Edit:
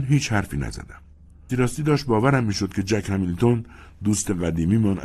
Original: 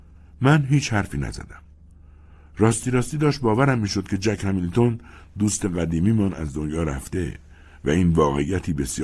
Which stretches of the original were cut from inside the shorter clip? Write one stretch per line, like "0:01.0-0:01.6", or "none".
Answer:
0:02.1-0:02.8